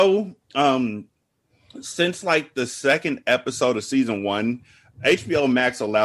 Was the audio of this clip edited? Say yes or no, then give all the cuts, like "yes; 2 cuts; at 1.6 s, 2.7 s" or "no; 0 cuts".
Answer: no; 0 cuts